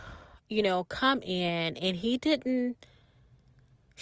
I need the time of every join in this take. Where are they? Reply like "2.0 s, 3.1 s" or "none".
none